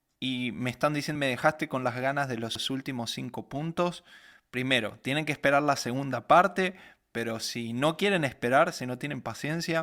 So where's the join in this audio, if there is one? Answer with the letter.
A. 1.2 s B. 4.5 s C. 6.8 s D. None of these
A